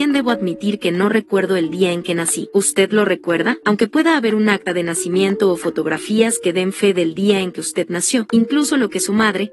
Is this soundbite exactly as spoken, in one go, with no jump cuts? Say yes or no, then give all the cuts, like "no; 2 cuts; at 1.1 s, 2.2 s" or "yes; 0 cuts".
yes; 0 cuts